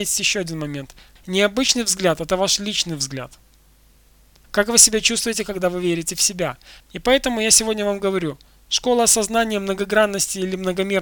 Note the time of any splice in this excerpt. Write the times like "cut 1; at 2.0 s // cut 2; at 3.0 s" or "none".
cut 1; at 1.2 s // cut 2; at 4.4 s // cut 3; at 6.8 s